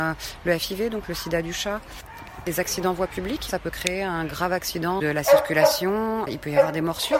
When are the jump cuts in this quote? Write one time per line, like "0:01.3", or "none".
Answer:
0:02.4
0:03.5